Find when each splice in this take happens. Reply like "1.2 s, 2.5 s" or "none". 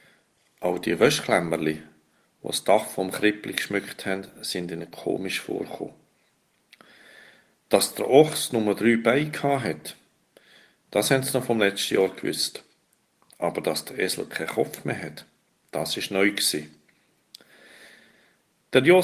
none